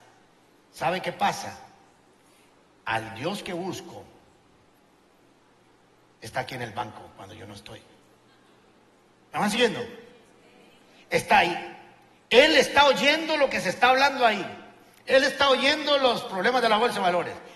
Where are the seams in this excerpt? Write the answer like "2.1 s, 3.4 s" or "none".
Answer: none